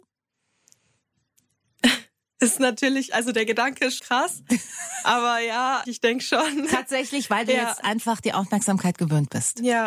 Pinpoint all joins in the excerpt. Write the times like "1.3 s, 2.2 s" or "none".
4.0 s, 5.8 s